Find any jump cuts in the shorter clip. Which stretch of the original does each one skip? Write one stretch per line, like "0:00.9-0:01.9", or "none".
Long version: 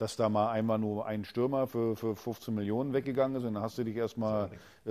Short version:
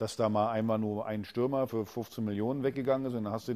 0:01.7-0:02.0